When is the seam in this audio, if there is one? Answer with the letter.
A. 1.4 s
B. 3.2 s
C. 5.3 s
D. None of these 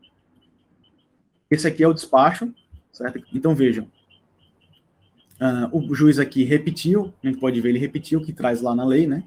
B